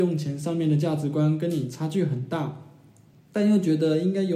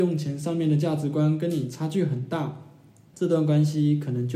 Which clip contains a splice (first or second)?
second